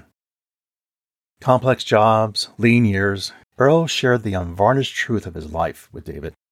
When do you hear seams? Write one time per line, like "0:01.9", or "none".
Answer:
0:03.4